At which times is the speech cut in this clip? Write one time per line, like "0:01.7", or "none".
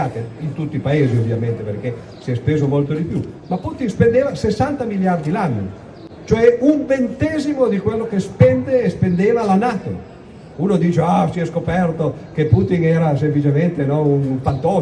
0:10.5